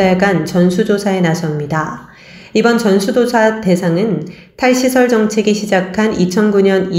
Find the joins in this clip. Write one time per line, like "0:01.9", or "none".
none